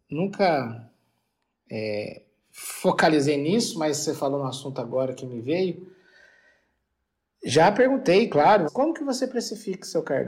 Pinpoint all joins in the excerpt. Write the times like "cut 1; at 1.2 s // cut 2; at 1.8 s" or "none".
cut 1; at 8.7 s